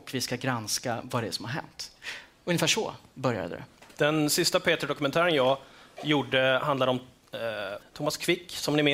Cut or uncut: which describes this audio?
cut